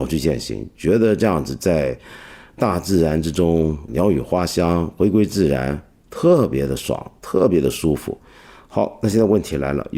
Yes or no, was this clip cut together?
no